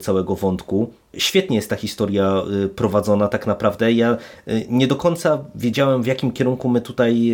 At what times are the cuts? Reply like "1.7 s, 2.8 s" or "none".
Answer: 1.1 s